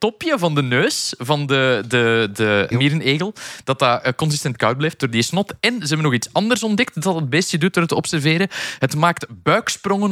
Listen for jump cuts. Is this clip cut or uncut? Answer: cut